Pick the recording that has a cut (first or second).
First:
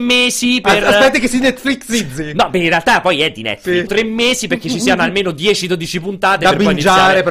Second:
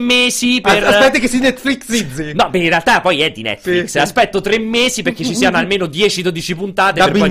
first